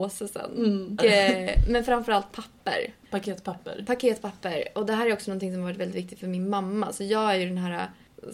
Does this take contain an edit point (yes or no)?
yes